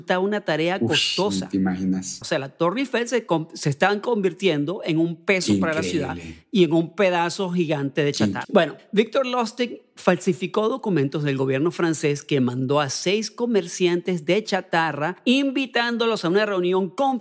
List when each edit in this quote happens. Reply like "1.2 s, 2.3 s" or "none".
2.2 s, 8.4 s